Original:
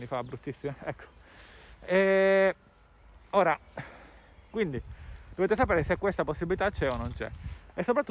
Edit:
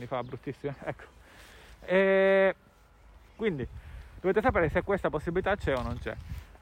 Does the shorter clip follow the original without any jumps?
no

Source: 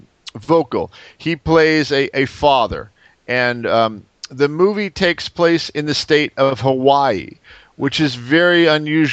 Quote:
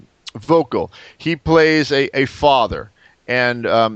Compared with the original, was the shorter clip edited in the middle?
no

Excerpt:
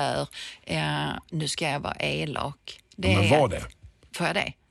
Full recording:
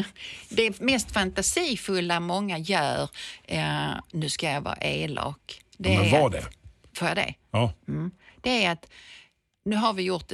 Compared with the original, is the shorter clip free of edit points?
yes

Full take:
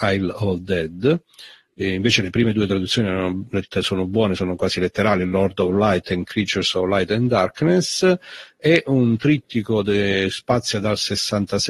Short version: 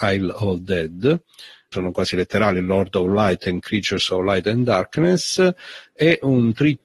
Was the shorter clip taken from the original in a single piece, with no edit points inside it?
no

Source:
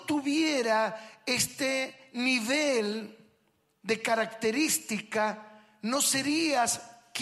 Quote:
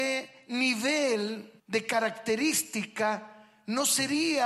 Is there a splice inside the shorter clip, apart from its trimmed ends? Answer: yes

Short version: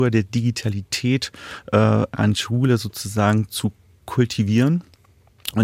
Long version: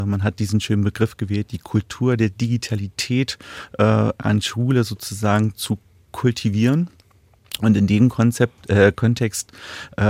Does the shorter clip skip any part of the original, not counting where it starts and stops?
no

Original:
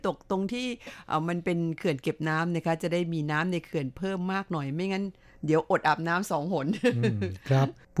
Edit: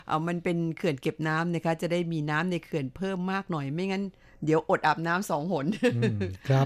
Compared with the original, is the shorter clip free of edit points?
yes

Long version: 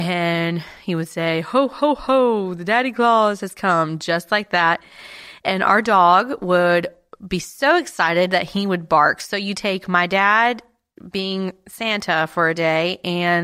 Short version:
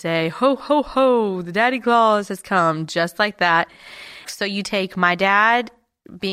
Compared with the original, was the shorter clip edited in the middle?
yes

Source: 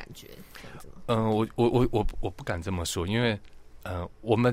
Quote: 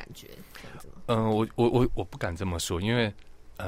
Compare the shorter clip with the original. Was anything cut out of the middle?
yes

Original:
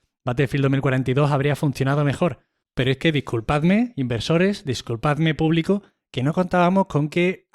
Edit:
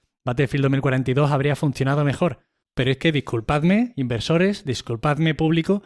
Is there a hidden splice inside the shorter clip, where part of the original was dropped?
no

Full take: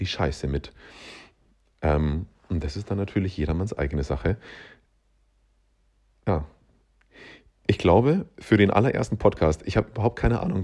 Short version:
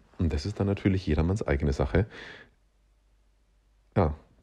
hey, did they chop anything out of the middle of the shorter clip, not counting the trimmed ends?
no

